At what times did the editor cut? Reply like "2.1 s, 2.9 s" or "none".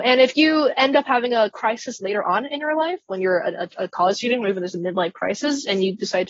none